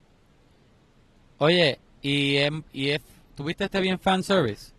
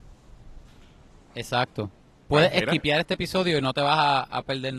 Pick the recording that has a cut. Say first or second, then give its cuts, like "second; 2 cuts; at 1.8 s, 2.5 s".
first; 1 cut; at 2.7 s